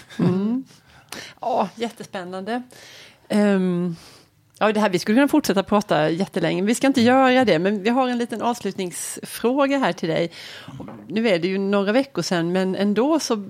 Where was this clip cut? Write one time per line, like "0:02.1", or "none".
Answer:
none